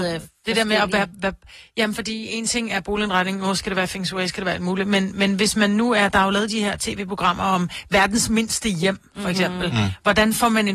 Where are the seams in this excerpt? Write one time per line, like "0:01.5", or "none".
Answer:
none